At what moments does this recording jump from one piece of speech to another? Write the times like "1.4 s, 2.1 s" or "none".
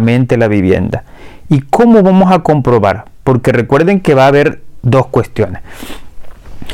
none

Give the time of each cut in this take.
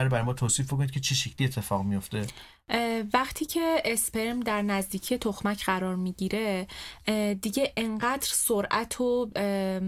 none

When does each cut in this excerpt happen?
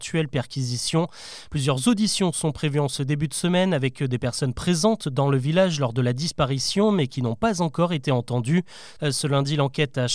1.5 s, 9.0 s

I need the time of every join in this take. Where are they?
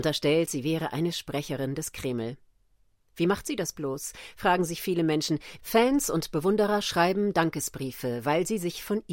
5.6 s

